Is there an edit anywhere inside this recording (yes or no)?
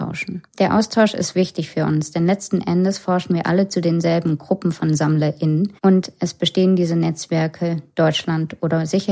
yes